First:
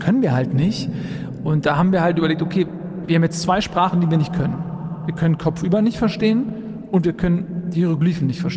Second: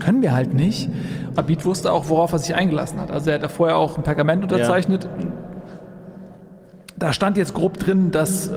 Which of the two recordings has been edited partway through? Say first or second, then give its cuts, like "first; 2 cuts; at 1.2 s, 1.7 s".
second; 1 cut; at 1.4 s